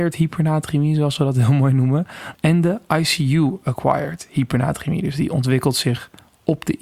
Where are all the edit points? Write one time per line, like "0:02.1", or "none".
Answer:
0:02.3